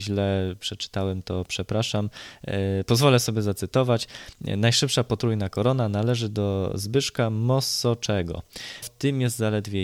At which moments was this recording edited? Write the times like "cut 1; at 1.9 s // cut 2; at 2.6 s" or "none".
cut 1; at 8.8 s